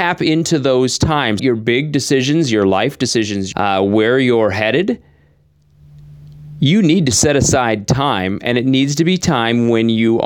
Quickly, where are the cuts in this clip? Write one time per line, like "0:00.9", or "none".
0:01.4
0:03.5

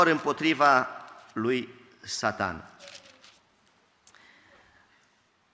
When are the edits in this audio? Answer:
none

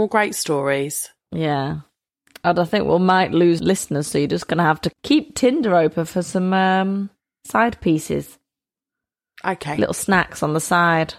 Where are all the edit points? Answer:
none

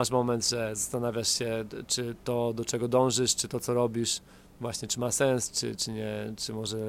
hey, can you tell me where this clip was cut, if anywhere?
none

